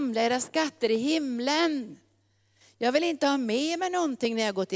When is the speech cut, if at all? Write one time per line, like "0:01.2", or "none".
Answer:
none